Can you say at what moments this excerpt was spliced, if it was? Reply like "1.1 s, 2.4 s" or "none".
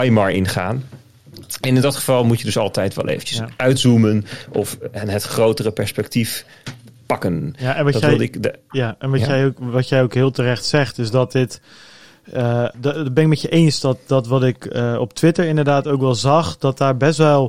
12.7 s